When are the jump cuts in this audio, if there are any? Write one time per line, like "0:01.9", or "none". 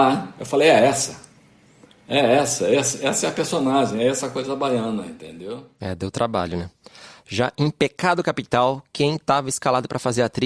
0:05.8

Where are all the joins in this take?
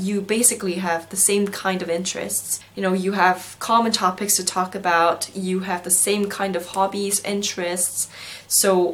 none

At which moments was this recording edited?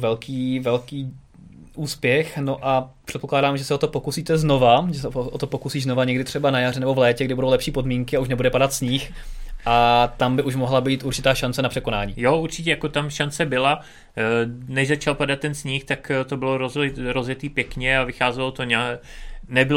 none

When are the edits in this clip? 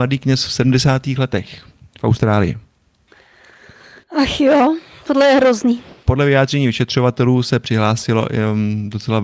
none

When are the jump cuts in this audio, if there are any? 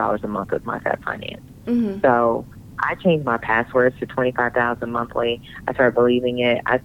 none

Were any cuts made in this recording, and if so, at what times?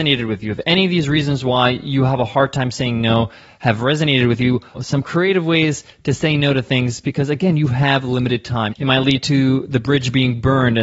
0:04.7
0:08.7

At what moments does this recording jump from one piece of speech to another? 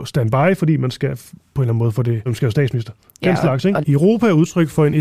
0:02.3
0:03.8

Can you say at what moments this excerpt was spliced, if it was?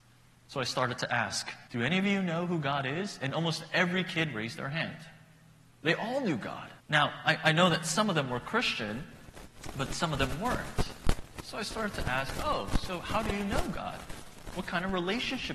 0:01.7
0:06.8

